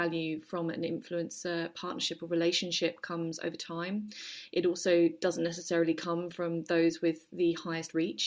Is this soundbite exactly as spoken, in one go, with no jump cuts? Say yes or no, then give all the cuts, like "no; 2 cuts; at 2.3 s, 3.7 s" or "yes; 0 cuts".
yes; 0 cuts